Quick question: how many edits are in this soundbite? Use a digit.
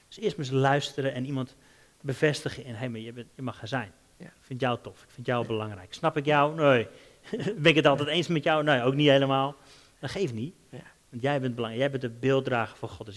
0